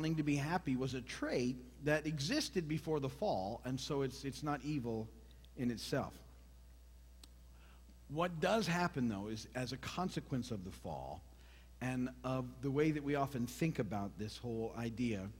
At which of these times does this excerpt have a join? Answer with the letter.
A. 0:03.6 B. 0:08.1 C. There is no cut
C